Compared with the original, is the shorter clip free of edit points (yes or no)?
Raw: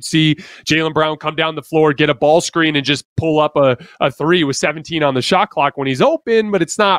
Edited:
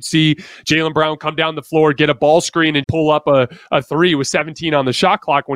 no